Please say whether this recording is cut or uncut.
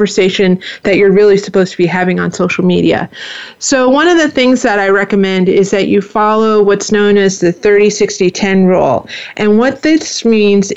uncut